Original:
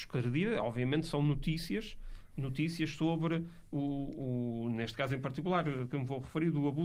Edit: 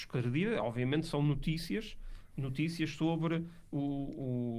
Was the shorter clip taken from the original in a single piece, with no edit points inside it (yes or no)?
yes